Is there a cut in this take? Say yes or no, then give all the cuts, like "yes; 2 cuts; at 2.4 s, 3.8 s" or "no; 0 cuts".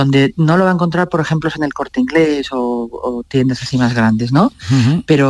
no; 0 cuts